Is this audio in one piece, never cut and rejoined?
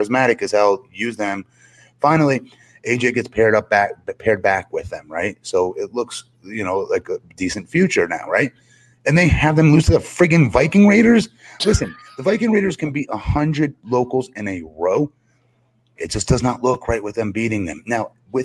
no; 1 cut; at 16.0 s

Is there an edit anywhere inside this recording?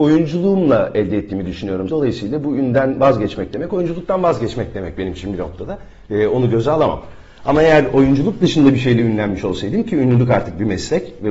yes; 1 cut; at 1.9 s

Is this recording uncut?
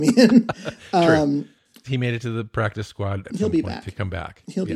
no; 2 cuts; at 1.8 s, 3.2 s

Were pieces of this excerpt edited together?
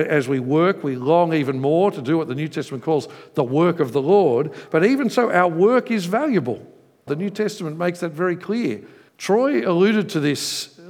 yes; 2 cuts; at 7.1 s, 9.1 s

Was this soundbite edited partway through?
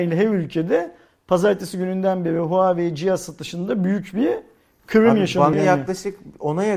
yes; 1 cut; at 5.5 s

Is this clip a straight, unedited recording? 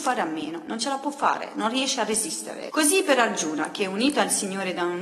no; 1 cut; at 2.7 s

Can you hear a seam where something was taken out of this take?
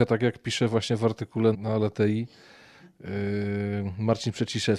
yes; 1 cut; at 1.5 s

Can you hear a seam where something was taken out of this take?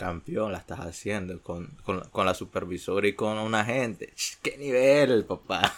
no; 0 cuts

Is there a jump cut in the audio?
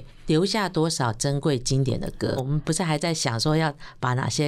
yes; 1 cut; at 2.4 s

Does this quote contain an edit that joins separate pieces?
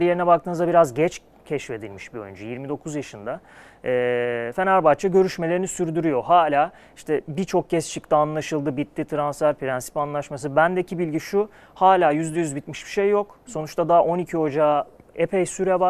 no; 0 cuts

